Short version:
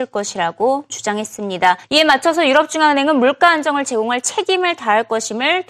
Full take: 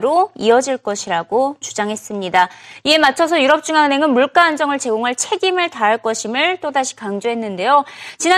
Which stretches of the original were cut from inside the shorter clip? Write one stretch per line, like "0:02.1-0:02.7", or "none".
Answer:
0:02.6-0:02.8